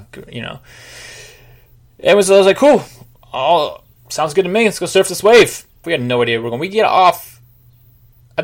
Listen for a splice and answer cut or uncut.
cut